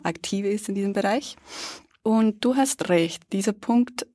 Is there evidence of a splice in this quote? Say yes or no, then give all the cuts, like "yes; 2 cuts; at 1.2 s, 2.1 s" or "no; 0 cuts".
no; 0 cuts